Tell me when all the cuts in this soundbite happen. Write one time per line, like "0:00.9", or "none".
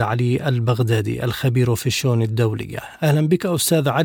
none